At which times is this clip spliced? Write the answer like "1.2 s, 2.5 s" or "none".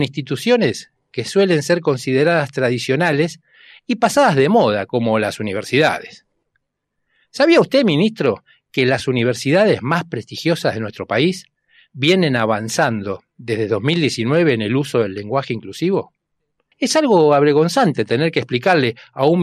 16.7 s